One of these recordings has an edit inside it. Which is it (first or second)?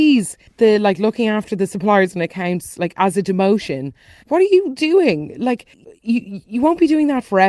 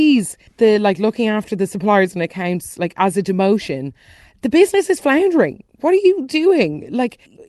first